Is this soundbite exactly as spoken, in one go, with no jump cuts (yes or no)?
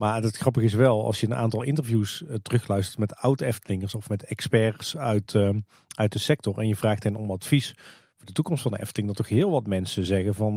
yes